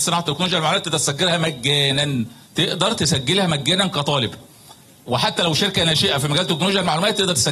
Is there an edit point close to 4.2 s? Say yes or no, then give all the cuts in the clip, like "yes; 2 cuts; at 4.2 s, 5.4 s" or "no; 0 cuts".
no; 1 cut; at 2.4 s